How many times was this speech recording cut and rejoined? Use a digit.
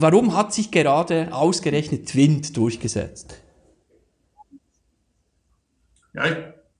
0